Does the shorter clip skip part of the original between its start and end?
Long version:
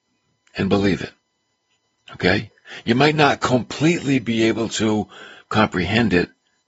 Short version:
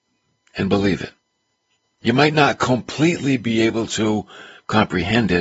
yes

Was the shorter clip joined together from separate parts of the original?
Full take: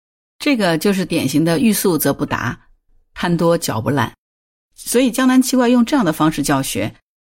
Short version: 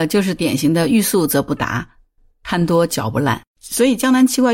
yes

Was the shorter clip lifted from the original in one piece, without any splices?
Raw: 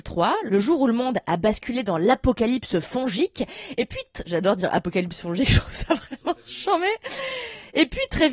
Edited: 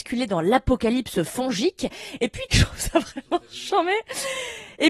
no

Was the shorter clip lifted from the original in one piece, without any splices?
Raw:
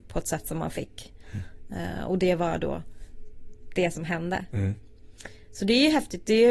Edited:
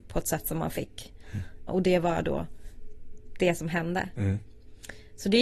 no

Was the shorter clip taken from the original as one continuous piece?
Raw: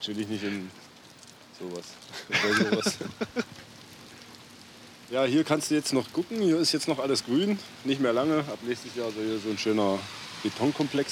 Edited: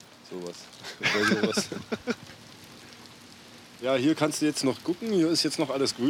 yes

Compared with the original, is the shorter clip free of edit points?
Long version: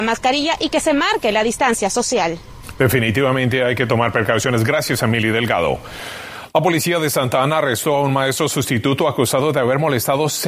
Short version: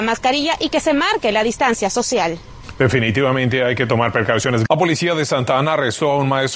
no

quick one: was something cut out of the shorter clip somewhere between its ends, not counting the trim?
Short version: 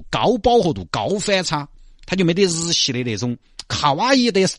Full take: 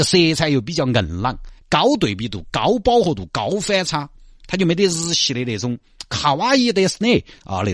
no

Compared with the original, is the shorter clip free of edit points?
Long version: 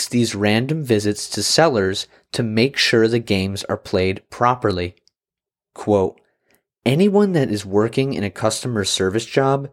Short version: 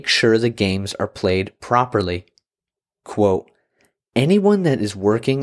yes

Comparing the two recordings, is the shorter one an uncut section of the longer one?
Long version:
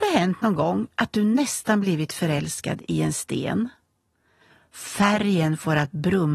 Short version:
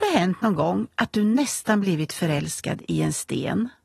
yes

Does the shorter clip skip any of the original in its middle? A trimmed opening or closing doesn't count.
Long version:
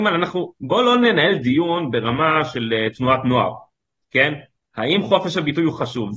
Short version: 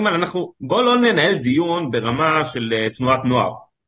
no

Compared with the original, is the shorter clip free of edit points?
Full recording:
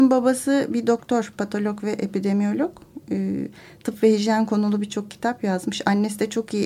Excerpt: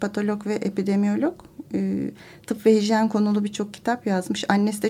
yes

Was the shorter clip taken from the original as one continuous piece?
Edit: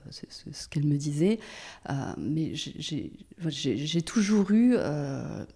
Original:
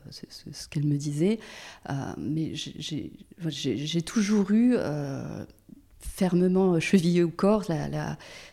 yes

